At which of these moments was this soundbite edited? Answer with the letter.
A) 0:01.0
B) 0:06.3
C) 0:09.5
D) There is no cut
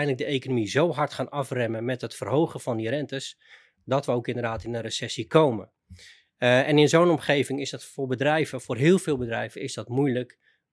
D